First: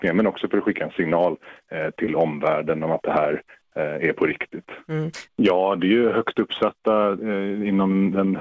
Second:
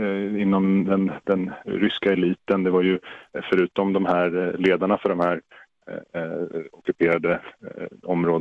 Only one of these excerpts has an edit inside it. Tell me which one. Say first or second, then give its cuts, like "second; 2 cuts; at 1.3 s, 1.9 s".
first; 1 cut; at 5.3 s